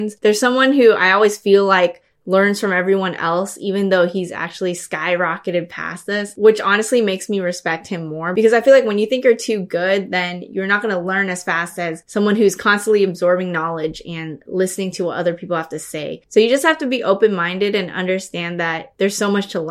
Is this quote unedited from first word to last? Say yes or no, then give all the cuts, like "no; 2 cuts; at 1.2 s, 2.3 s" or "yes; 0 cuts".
yes; 0 cuts